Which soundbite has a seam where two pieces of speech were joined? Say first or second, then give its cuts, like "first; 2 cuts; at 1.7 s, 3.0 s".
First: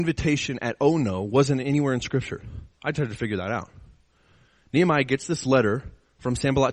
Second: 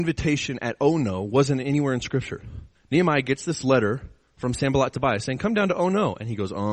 second; 1 cut; at 2.8 s